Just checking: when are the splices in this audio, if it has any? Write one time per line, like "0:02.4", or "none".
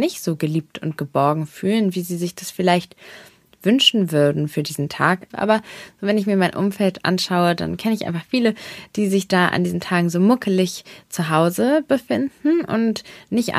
0:05.3